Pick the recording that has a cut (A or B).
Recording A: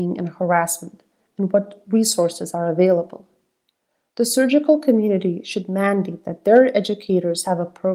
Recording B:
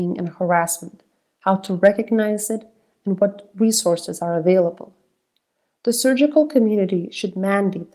A